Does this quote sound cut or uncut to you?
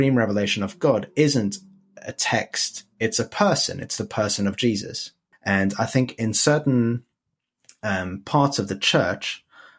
cut